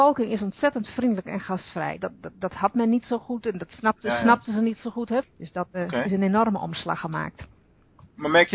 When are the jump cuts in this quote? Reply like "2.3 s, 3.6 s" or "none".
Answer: 2.0 s, 5.2 s